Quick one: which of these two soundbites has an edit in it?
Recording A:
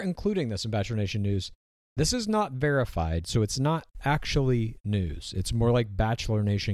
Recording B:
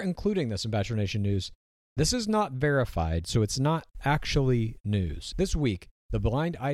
B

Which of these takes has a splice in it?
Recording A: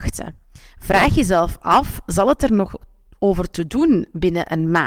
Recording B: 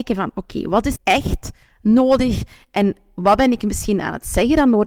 B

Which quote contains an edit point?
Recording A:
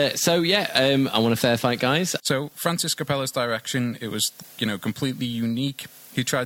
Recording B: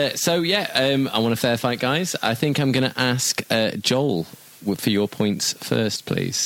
A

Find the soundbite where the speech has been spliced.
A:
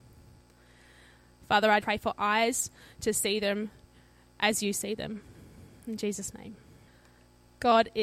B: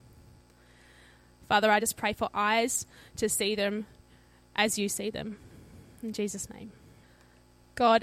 A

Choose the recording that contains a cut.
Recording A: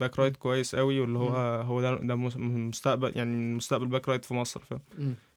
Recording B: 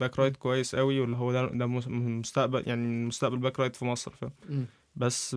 B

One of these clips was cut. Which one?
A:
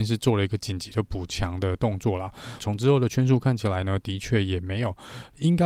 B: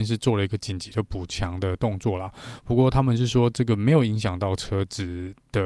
A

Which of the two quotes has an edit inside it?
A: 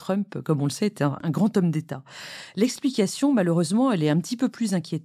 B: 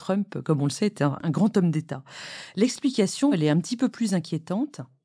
B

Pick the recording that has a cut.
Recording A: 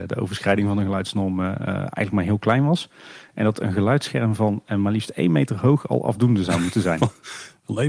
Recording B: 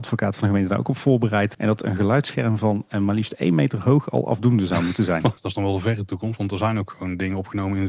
B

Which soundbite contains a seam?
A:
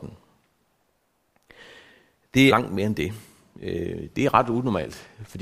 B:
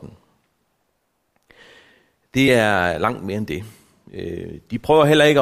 A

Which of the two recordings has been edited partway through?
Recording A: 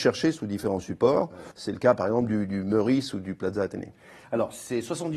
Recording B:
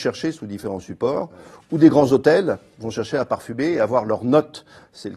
A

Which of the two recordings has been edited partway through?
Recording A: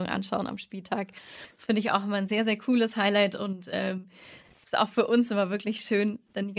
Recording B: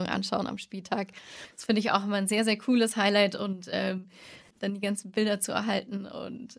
B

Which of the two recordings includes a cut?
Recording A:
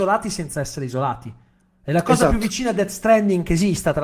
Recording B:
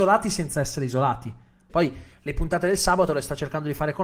B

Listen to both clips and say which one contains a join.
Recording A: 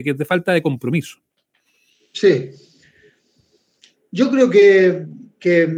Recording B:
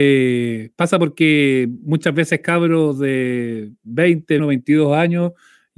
B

